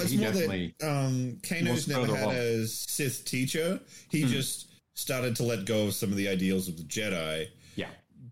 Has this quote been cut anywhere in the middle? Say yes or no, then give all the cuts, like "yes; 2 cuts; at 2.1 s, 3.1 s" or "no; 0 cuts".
no; 0 cuts